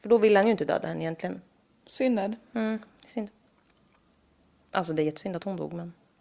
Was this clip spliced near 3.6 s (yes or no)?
no